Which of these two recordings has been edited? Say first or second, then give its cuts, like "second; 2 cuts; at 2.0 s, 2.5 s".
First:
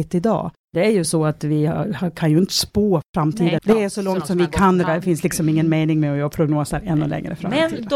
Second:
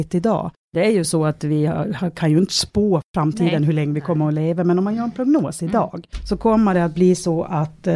first; 2 cuts; at 3.6 s, 4.8 s